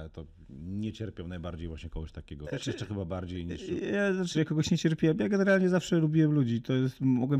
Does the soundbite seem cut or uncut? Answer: cut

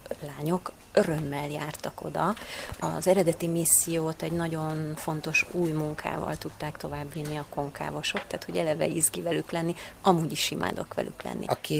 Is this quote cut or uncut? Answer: cut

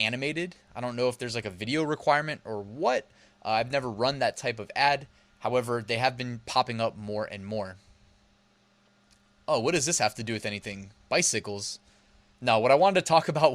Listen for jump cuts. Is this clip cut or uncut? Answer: uncut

